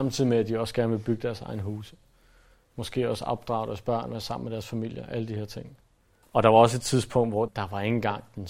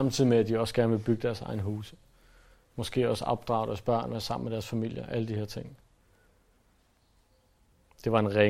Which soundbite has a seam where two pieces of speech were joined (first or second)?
first